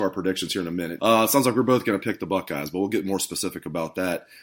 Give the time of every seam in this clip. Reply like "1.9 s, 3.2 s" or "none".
1.0 s

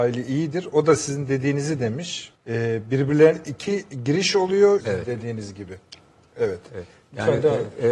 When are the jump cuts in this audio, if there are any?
2.3 s, 4.8 s

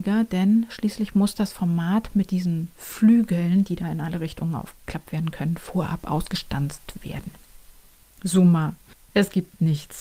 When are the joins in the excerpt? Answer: none

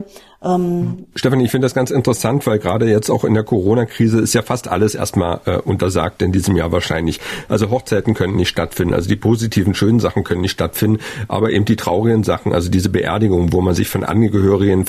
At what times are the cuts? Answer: 1.1 s

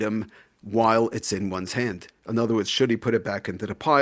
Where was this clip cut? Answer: none

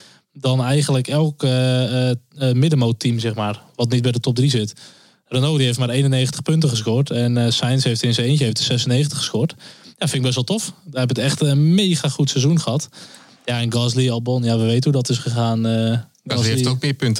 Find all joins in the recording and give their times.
none

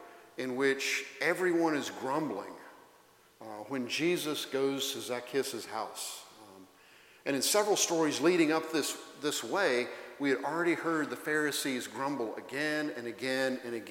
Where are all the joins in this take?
none

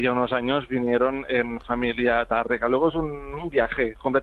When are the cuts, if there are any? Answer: none

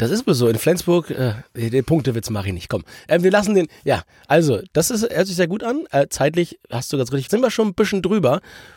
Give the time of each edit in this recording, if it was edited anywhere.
7.3 s

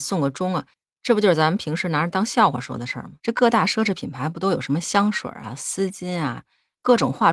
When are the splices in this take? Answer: 3.2 s

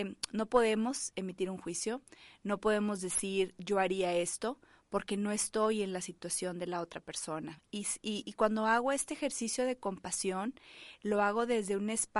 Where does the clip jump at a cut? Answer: none

